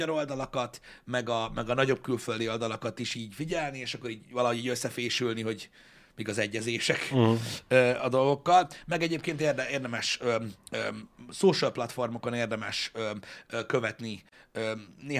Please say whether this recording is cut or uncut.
uncut